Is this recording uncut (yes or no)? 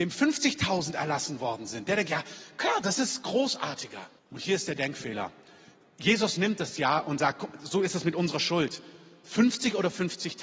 no